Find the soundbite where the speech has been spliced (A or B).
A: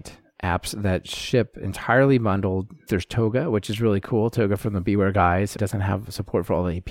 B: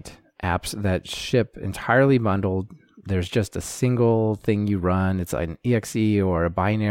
A